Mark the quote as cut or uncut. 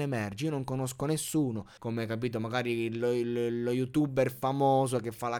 cut